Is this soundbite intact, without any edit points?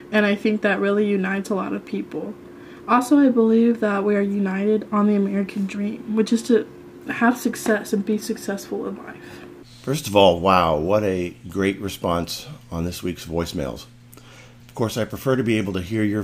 yes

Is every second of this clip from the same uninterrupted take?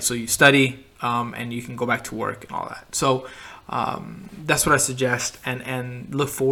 yes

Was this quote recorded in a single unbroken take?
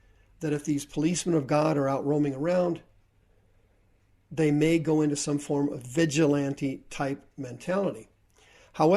yes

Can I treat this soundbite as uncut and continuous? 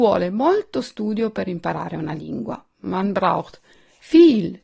yes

